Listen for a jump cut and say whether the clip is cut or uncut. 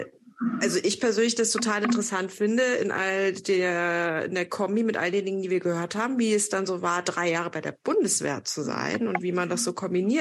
uncut